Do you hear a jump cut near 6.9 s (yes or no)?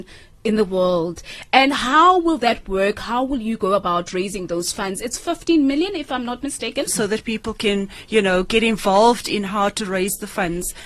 yes